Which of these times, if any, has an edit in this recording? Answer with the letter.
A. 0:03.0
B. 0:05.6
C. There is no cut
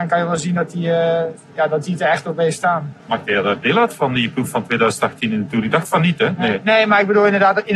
A